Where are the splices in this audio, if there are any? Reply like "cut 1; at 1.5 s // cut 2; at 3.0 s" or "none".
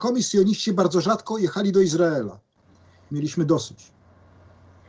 cut 1; at 3.1 s